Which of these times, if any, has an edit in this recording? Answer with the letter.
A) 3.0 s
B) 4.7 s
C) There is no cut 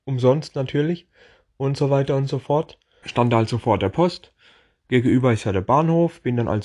A